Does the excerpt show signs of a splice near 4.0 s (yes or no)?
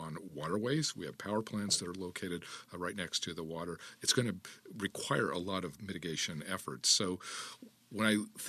no